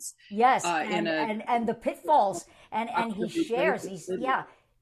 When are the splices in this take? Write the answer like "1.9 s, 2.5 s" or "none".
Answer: none